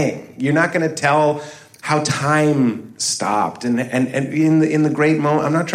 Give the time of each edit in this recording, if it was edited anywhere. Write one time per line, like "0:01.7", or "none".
none